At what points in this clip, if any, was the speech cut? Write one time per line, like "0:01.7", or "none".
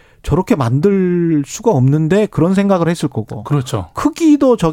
none